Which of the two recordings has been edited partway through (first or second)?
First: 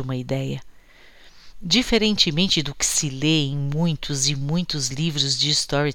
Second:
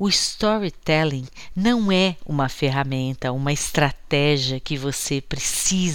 first